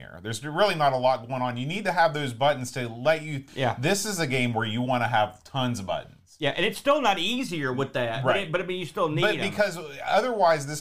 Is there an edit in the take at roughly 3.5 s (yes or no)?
yes